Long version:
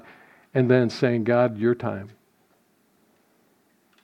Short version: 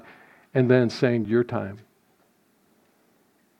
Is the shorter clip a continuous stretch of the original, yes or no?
no